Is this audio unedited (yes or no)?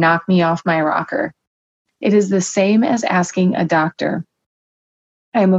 yes